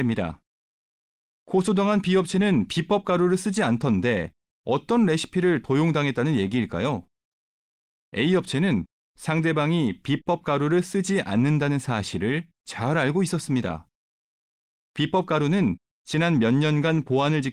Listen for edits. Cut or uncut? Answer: uncut